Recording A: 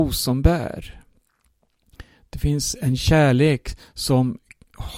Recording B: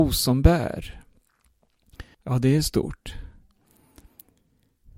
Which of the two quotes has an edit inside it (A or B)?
B